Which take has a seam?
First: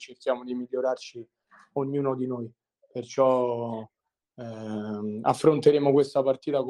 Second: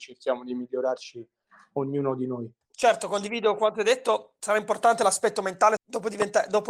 second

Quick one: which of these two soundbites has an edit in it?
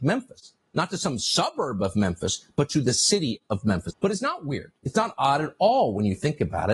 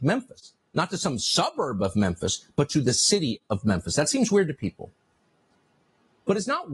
first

